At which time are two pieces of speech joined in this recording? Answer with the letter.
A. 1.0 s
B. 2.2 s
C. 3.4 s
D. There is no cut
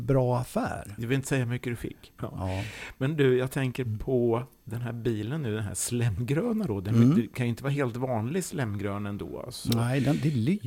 B